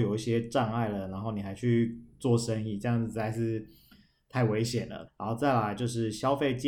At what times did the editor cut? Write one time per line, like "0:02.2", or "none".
0:05.1